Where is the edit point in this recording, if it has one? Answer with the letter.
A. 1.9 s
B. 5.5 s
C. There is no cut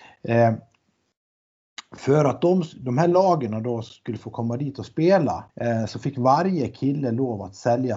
B